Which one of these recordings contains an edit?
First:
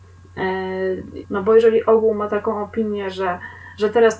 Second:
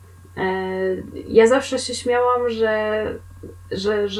first; 1 cut; at 1.2 s

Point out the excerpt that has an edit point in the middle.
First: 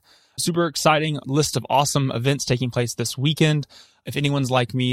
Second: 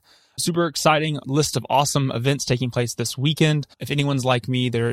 second; 1 cut; at 3.7 s

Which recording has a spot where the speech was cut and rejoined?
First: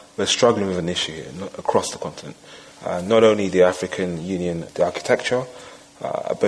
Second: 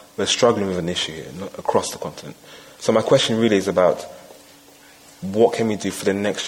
first; 2 cuts; at 2.7 s, 4.7 s

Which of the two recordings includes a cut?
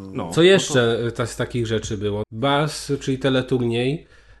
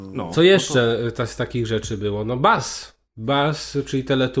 first; 1 cut; at 2.2 s

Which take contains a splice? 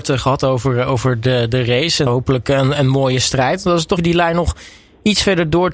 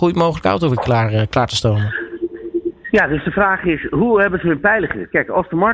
first; 2 cuts; at 2.1 s, 4.0 s

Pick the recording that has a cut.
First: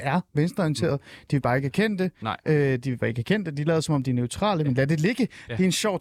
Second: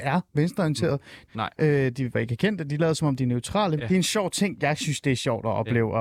second; 2 cuts; at 1.3 s, 3.8 s

